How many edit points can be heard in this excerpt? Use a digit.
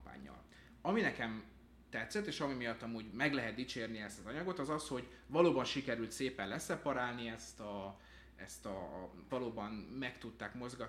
1